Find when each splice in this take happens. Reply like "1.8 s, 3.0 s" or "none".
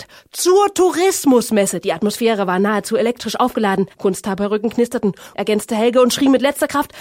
3.9 s, 5.3 s

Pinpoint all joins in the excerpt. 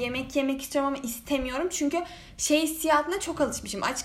none

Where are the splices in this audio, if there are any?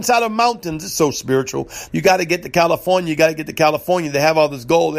1.9 s

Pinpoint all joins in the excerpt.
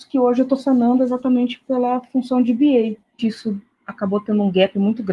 3.2 s

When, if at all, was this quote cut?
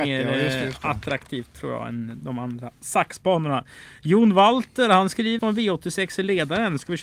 5.4 s

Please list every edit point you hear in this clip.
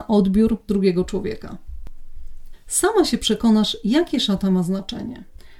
2.5 s

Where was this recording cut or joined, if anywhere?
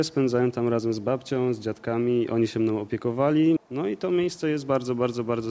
3.6 s

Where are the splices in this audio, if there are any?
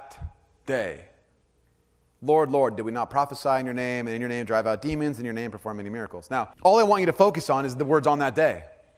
6.5 s

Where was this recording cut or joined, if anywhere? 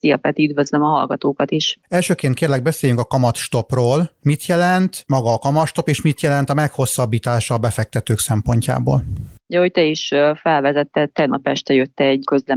none

